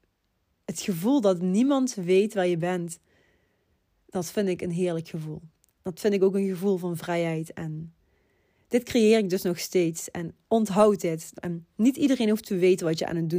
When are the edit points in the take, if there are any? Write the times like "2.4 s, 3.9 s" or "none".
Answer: 11.3 s